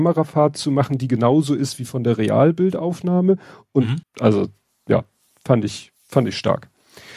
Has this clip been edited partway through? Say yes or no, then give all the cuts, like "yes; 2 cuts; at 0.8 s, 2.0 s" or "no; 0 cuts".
yes; 2 cuts; at 4.0 s, 6.0 s